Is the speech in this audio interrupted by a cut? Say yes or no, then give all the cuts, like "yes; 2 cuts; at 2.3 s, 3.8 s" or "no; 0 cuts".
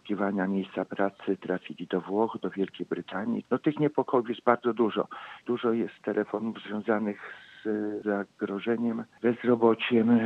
no; 0 cuts